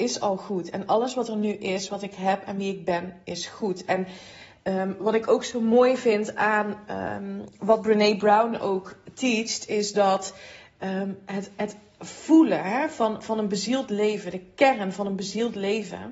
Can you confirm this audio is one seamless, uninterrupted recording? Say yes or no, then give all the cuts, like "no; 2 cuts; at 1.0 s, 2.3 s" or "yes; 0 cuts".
yes; 0 cuts